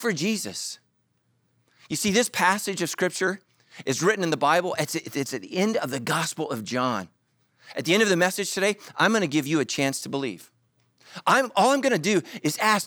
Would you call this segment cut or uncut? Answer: uncut